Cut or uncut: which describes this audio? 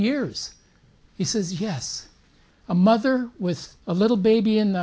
cut